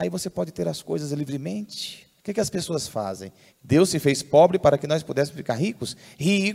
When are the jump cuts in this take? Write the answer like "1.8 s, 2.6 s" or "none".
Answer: 2.2 s, 3.5 s